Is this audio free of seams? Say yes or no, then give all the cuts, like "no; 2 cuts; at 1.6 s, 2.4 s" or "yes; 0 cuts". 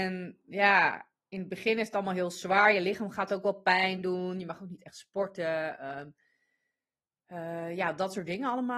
yes; 0 cuts